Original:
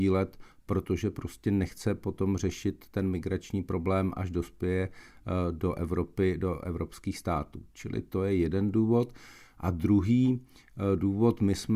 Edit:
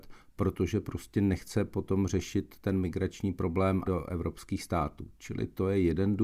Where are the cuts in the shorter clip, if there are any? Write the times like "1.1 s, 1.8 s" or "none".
3.8 s